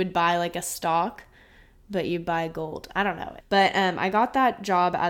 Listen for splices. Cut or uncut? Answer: cut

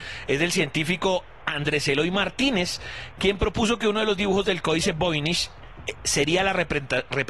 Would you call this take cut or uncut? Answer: uncut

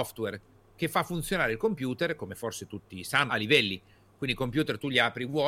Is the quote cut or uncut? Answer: cut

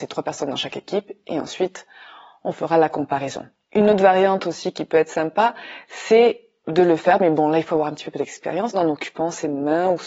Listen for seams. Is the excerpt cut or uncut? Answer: cut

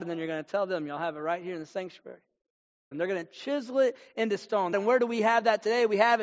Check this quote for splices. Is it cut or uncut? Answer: cut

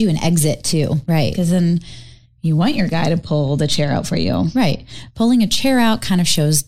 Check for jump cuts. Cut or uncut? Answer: cut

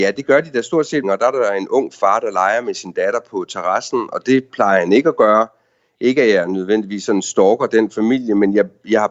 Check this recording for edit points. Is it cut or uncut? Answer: cut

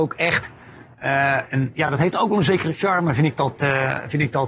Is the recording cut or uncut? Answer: uncut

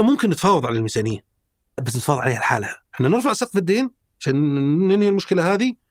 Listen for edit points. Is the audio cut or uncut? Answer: cut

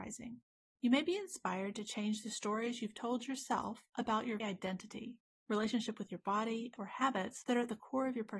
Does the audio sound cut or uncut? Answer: cut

